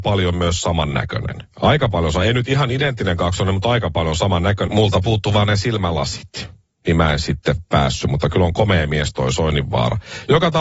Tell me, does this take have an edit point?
yes; 2 cuts; at 1.5 s, 4.7 s

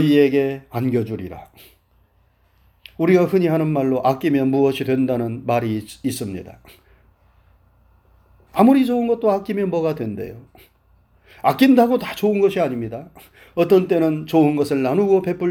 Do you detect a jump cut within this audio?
no; 0 cuts

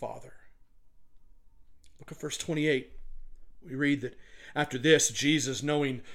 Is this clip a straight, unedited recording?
yes; 0 cuts

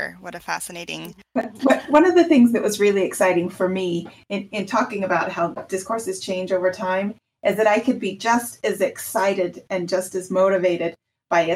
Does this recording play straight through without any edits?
no; 1 cut; at 1.2 s

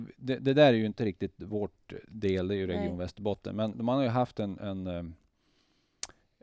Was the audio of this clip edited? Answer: yes; 1 cut; at 3.7 s

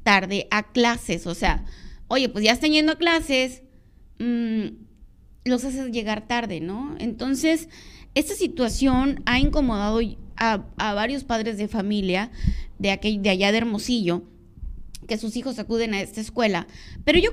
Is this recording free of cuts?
yes; 0 cuts

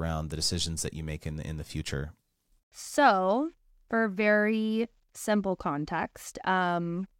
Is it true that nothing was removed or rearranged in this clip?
yes; 0 cuts

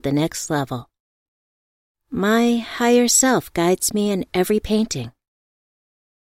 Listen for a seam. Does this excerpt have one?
yes; 1 cut; at 1.9 s

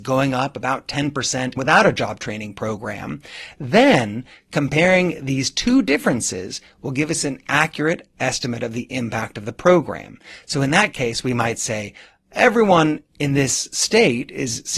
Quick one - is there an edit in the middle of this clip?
yes; 1 cut; at 1.6 s

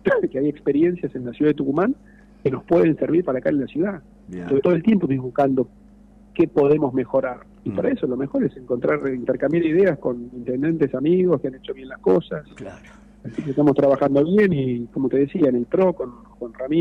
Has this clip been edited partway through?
yes; 1 cut; at 7.6 s

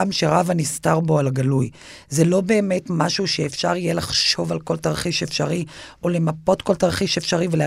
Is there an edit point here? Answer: no; 0 cuts

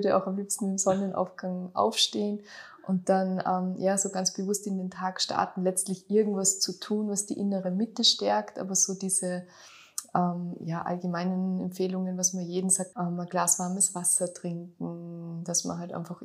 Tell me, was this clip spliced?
yes; 1 cut; at 12.9 s

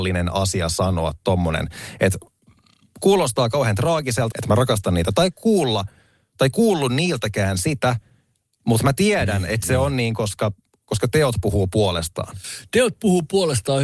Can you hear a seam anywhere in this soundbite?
yes; 1 cut; at 4.3 s

